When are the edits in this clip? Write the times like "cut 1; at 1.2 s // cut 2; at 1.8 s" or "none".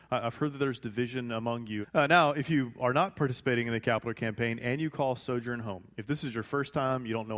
cut 1; at 1.8 s

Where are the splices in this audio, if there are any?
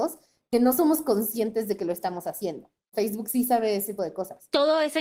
cut 1; at 2.9 s // cut 2; at 4.0 s

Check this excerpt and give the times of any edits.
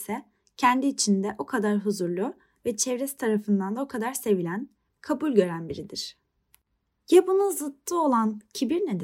cut 1; at 4.9 s

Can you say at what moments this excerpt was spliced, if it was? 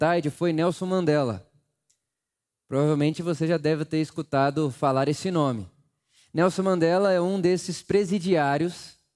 none

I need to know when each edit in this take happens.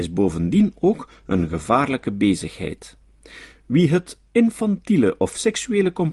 none

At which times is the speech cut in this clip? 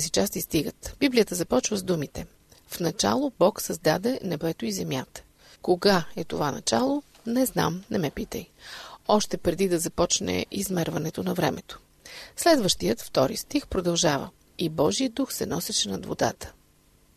cut 1; at 5.5 s // cut 2; at 14.5 s

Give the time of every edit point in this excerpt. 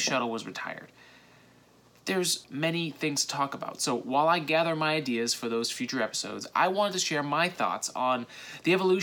cut 1; at 2.4 s

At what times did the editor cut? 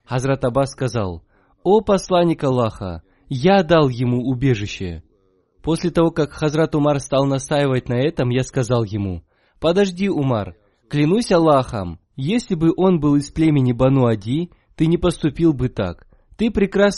none

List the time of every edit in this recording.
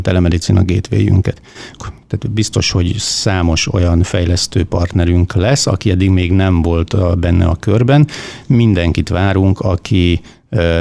cut 1; at 1.8 s

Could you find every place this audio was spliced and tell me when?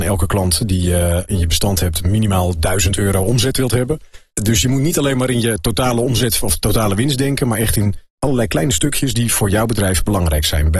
none

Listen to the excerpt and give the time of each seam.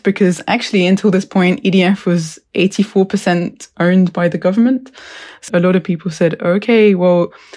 cut 1; at 5.5 s

